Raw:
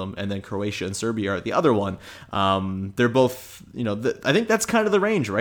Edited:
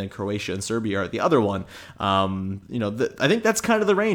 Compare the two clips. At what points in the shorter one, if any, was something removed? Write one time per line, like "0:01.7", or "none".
0:02.6